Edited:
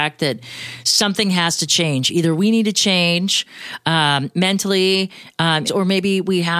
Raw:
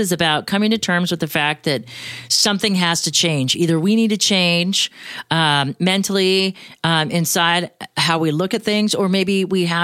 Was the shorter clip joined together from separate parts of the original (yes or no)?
yes